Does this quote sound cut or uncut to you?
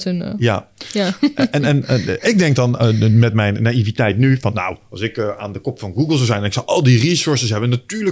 uncut